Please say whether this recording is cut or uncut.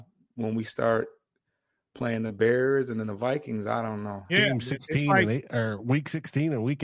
cut